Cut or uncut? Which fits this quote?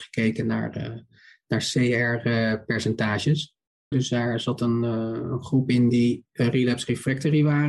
cut